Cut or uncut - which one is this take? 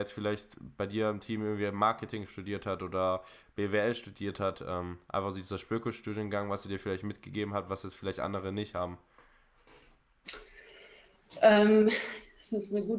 uncut